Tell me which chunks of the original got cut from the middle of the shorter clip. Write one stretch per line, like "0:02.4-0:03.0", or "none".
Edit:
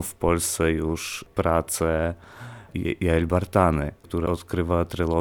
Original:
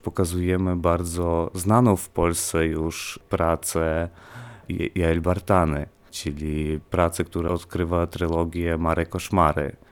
0:06.0-0:07.3